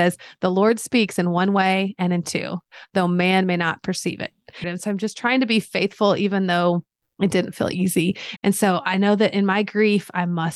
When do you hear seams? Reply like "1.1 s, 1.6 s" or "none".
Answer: 4.6 s, 8.4 s